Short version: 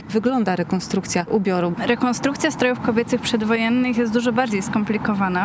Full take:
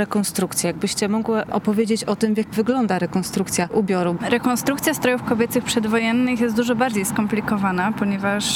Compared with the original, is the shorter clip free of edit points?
yes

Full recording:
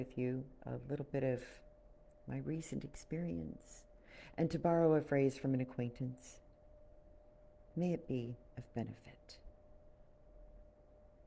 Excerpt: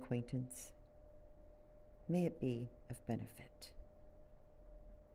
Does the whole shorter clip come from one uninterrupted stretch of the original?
yes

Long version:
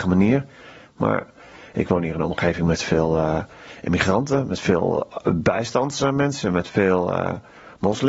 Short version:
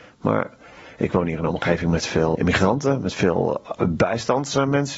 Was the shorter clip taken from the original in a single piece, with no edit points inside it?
no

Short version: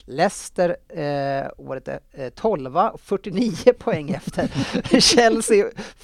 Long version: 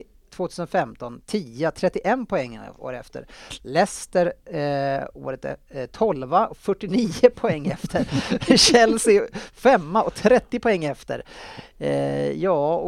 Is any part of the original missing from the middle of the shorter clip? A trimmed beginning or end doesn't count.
no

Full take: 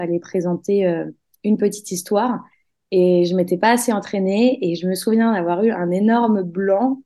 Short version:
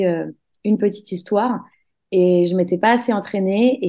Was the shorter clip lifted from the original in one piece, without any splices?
yes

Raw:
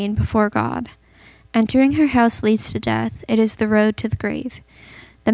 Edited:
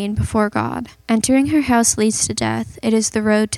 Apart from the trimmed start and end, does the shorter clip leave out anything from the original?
yes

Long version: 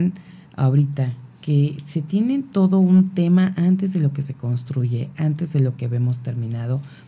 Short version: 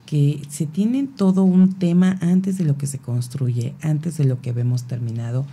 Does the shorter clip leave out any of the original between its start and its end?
no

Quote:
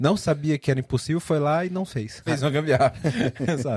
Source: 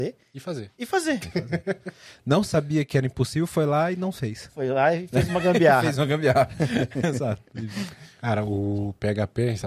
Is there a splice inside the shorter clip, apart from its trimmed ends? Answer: yes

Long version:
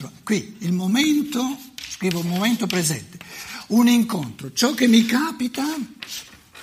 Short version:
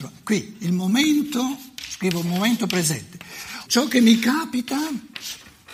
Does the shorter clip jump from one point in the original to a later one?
yes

